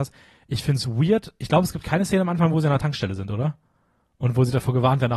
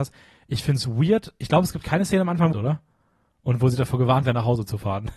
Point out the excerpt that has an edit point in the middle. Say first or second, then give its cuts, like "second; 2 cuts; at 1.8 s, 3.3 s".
second; 1 cut; at 2.5 s